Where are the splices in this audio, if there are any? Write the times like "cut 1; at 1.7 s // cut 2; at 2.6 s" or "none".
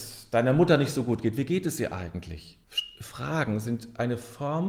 cut 1; at 2.6 s

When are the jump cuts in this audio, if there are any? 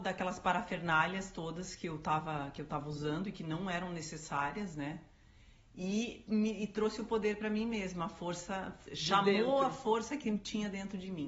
cut 1; at 6.3 s // cut 2; at 8.9 s

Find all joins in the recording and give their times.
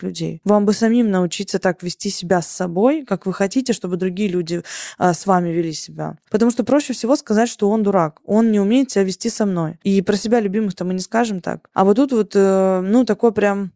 cut 1; at 6.2 s

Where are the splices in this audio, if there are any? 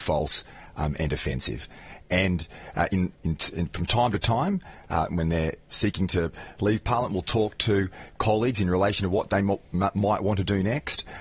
cut 1; at 3.2 s // cut 2; at 5.1 s

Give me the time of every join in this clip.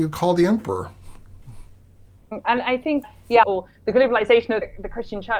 cut 1; at 3.4 s

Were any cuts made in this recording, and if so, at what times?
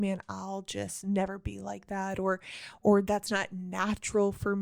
none

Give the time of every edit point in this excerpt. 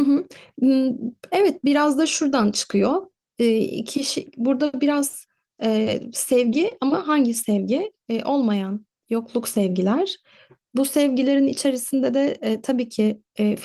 none

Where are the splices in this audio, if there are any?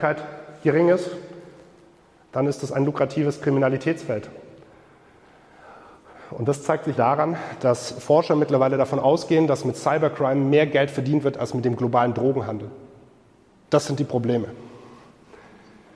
cut 1; at 7.0 s // cut 2; at 13.6 s

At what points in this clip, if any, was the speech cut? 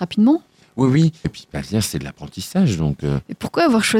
cut 1; at 1.2 s

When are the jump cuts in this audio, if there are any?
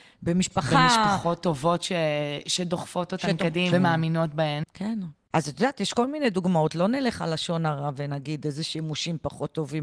cut 1; at 3.7 s // cut 2; at 5.3 s

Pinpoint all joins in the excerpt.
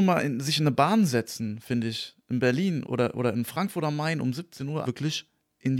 cut 1; at 2.9 s // cut 2; at 4.8 s

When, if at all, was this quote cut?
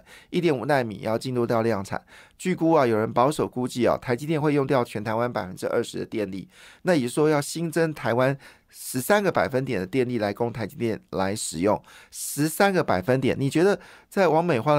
none

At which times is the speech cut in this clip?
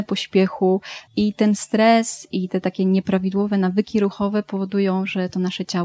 cut 1; at 1.1 s

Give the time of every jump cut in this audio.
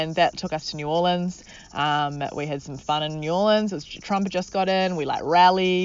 none

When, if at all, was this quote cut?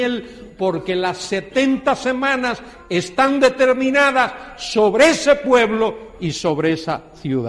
none

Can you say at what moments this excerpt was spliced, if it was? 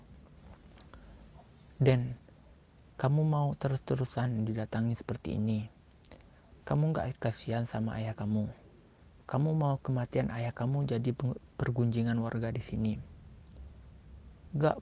none

